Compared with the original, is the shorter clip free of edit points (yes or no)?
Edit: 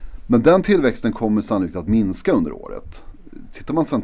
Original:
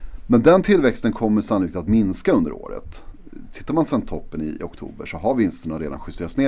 yes